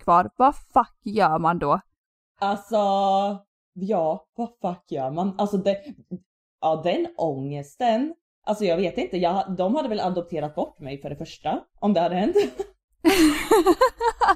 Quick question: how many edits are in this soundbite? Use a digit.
0